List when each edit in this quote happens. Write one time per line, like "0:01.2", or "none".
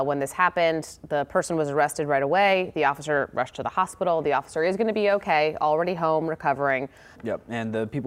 0:07.1